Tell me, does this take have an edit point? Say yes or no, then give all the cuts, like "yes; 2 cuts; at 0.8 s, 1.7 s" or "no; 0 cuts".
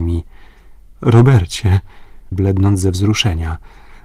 yes; 1 cut; at 2.3 s